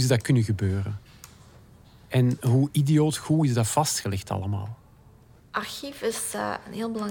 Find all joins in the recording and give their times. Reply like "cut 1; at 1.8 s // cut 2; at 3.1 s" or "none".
none